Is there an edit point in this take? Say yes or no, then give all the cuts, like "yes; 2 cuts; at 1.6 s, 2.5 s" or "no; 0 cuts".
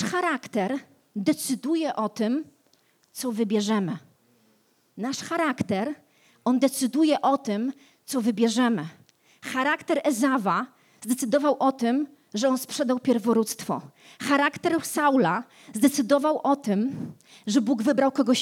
no; 0 cuts